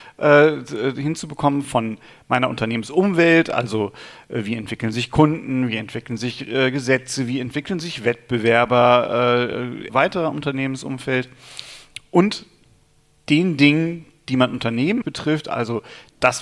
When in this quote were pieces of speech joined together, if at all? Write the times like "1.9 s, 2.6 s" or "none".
9.9 s, 15.0 s